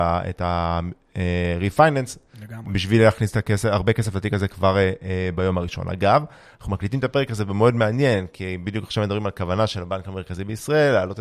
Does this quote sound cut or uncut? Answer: uncut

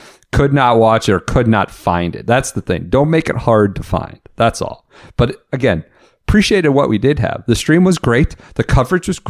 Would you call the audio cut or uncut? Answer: uncut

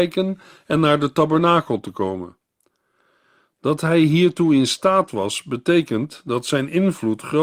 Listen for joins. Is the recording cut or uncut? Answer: uncut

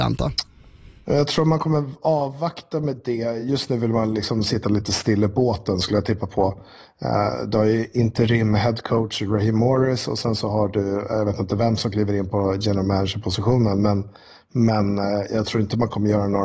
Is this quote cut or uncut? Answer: uncut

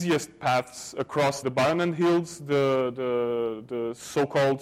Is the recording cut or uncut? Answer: cut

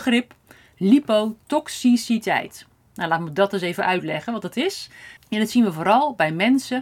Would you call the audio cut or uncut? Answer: cut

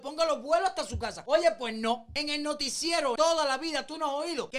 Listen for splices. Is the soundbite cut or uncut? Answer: cut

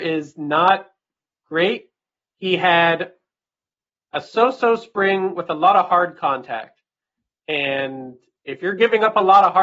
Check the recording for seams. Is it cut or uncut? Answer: uncut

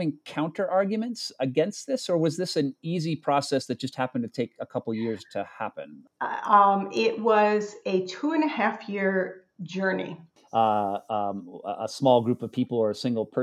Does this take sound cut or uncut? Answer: cut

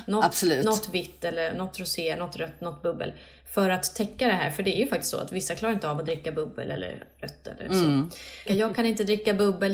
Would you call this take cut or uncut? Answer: cut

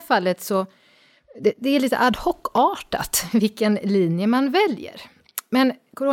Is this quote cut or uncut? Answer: uncut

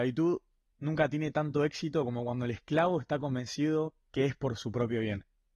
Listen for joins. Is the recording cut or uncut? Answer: uncut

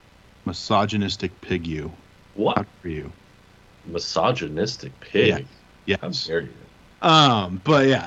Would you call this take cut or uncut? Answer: cut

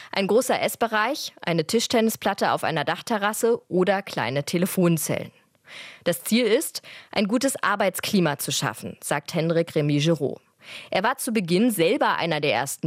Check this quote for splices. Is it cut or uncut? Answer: uncut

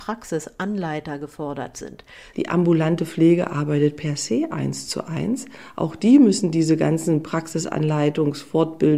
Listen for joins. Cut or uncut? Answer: cut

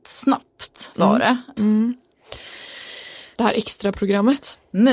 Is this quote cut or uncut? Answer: cut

